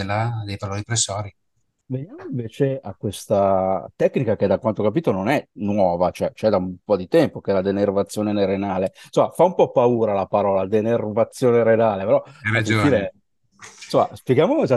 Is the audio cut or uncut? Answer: uncut